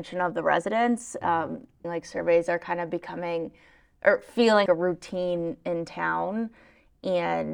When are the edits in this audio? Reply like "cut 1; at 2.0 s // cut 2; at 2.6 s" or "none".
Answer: cut 1; at 1.8 s // cut 2; at 4.7 s